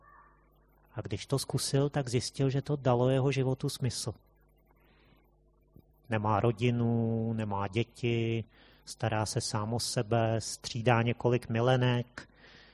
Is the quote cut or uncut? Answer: cut